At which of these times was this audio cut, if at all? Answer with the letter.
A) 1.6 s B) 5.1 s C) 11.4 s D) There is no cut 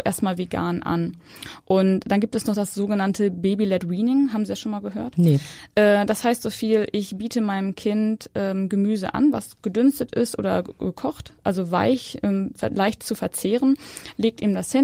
D